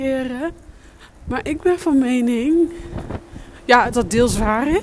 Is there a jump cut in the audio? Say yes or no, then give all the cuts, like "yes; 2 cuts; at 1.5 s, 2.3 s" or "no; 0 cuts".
yes; 1 cut; at 3.9 s